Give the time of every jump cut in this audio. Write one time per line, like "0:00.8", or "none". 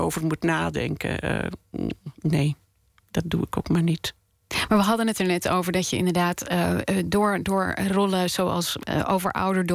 none